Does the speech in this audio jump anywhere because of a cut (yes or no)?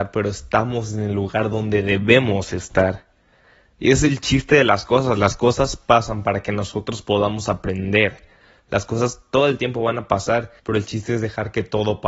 yes